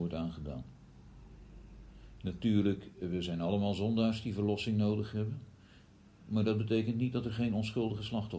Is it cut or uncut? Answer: uncut